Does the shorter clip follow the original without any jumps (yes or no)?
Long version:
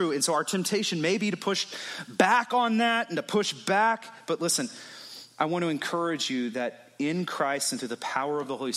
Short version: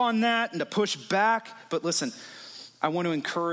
yes